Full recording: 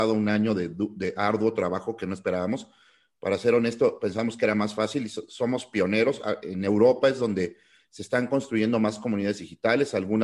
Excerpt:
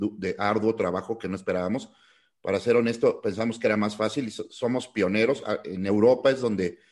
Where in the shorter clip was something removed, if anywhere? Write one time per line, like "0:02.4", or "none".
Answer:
none